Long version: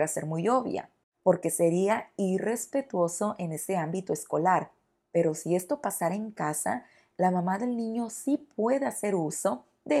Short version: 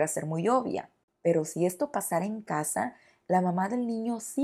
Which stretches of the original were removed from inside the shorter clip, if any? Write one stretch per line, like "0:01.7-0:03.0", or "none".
0:01.1-0:05.0